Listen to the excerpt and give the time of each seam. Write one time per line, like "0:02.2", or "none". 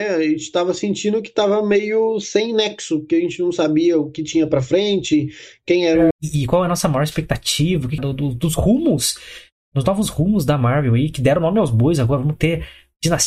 0:06.1
0:08.0